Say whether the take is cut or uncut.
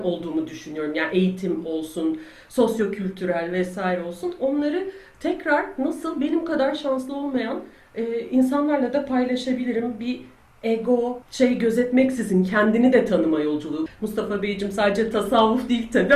cut